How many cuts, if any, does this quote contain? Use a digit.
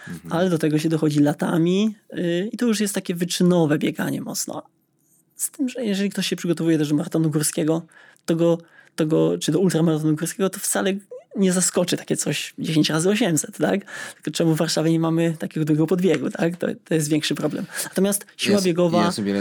0